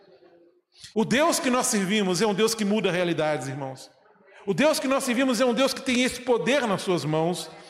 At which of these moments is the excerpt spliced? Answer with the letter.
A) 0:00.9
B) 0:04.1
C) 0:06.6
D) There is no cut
A